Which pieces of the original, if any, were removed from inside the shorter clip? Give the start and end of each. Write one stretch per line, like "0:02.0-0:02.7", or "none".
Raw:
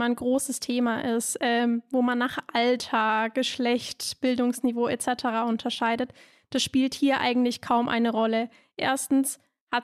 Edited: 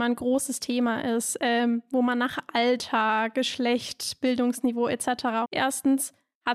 0:05.4-0:08.7